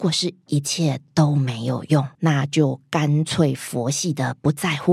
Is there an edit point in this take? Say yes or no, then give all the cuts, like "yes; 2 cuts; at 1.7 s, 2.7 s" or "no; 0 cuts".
yes; 1 cut; at 2.2 s